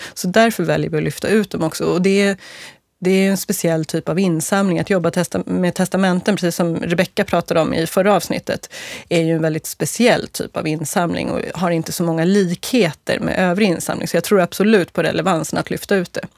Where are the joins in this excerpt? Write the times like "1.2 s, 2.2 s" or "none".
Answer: none